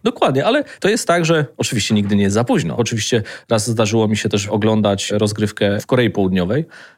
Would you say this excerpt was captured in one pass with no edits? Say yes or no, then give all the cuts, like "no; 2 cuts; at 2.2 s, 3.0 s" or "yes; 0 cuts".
no; 1 cut; at 2.8 s